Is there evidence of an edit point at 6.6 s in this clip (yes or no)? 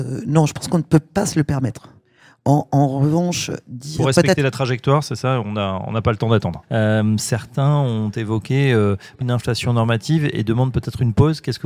yes